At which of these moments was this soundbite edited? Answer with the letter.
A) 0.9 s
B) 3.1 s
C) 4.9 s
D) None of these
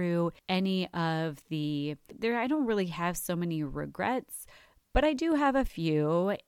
D